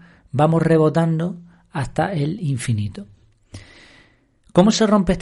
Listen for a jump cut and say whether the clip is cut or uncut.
uncut